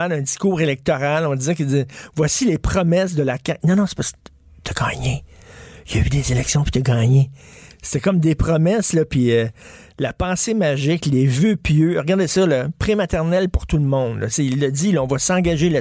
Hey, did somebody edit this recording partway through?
no; 0 cuts

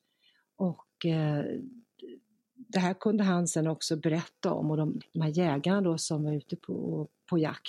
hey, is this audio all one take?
no; 2 cuts; at 5.0 s, 6.6 s

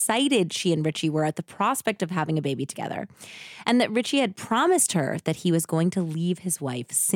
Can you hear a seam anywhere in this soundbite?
no; 0 cuts

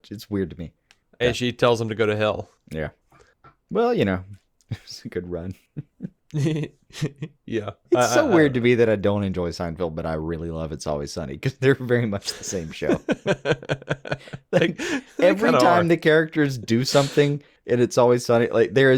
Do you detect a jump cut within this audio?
yes; 2 cuts; at 1.2 s, 7.9 s

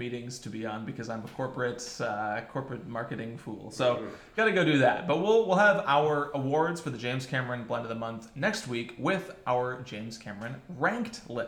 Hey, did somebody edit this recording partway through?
no; 0 cuts

